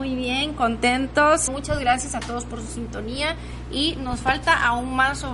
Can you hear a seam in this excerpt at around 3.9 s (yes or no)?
no